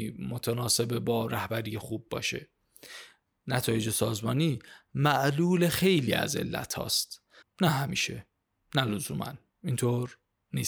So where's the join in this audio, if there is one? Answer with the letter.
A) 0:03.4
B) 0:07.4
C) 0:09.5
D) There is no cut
B